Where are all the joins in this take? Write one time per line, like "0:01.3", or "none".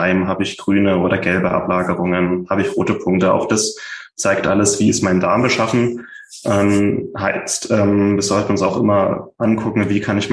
none